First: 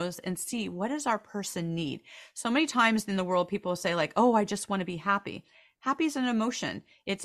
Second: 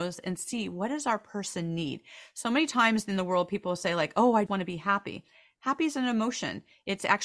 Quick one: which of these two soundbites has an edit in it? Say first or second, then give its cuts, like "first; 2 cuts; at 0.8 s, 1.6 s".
second; 1 cut; at 4.5 s